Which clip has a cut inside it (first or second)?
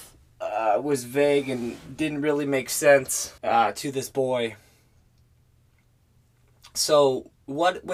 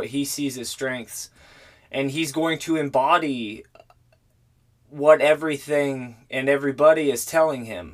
first